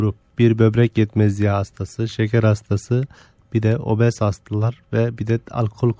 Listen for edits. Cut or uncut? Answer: uncut